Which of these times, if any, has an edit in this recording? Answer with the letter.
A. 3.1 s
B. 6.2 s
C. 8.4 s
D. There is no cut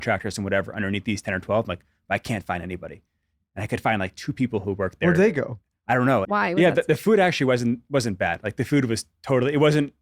B